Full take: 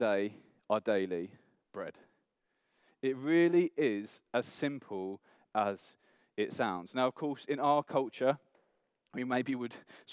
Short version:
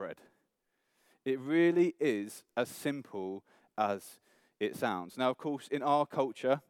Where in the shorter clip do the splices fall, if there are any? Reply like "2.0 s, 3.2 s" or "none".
none